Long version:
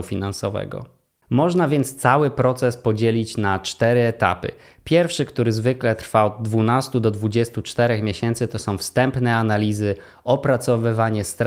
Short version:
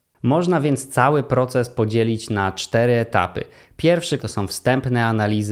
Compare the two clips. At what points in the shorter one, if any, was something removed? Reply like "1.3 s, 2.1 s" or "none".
4.2 s